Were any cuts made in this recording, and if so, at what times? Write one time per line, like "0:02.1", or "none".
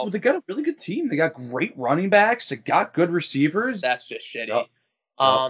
0:03.8